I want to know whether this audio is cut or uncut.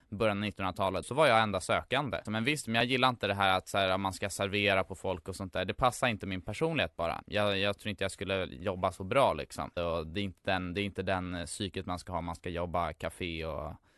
cut